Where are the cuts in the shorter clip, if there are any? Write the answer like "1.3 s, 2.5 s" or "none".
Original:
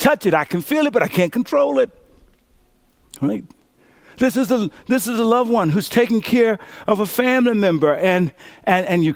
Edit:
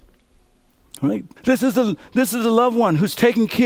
1.4 s